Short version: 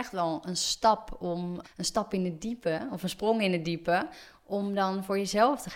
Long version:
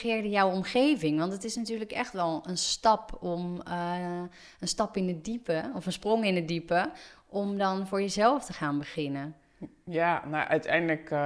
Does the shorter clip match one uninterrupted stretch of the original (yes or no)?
no